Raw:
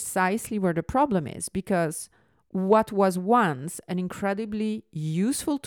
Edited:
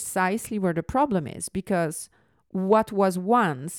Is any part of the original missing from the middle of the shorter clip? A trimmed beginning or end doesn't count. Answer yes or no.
no